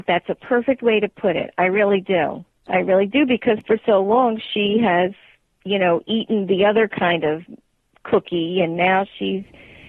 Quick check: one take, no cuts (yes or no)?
yes